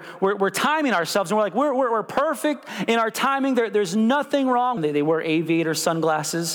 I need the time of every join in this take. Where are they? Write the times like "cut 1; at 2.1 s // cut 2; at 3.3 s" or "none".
cut 1; at 4.8 s